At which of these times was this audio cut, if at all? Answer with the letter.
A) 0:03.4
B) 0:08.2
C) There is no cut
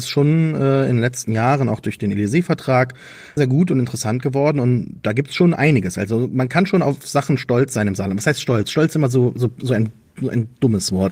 A